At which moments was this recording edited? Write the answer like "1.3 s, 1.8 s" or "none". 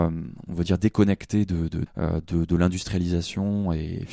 1.9 s